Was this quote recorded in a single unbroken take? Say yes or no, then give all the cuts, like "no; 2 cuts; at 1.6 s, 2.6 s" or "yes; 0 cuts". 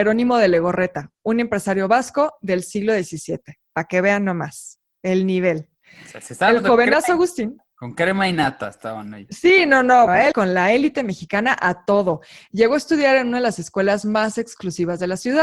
no; 1 cut; at 10.1 s